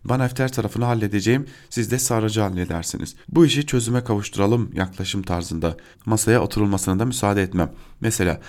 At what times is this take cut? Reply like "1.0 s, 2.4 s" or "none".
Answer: 3.2 s, 5.9 s